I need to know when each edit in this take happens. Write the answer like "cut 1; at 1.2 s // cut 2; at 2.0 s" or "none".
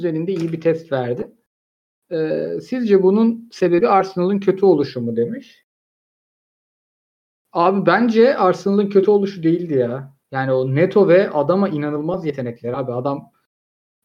cut 1; at 10.2 s